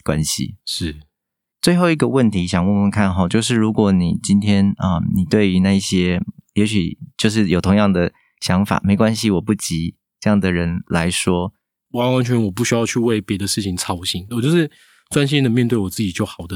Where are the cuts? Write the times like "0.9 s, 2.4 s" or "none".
11.9 s, 14.3 s